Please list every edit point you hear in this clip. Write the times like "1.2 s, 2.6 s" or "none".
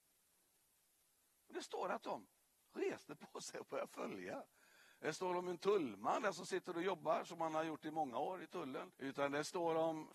8.9 s